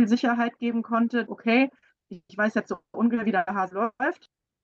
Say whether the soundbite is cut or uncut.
cut